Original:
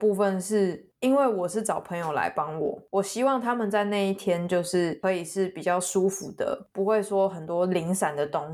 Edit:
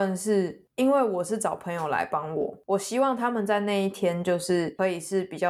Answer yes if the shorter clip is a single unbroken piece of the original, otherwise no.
yes